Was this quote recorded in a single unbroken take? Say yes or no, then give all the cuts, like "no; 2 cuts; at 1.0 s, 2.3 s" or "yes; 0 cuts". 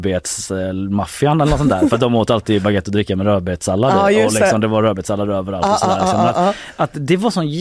yes; 0 cuts